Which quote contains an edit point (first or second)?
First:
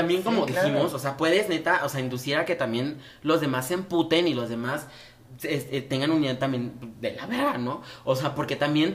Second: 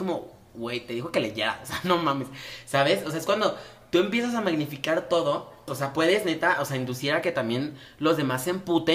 second